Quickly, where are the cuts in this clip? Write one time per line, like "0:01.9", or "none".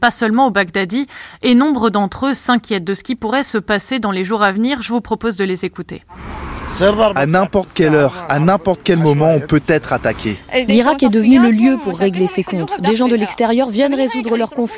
none